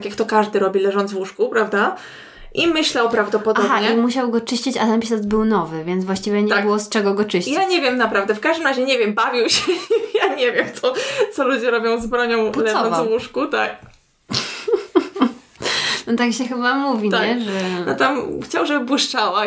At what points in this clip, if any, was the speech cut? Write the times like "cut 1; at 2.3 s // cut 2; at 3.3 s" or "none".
none